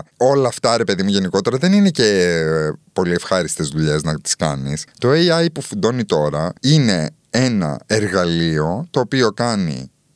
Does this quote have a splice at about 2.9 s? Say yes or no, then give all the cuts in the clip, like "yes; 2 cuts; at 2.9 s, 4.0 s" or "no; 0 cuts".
no; 2 cuts; at 4.9 s, 6.6 s